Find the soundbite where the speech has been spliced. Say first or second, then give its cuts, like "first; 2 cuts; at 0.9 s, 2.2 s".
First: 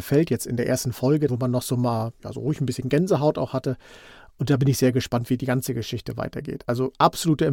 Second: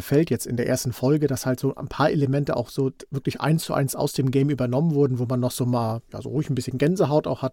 first; 1 cut; at 1.3 s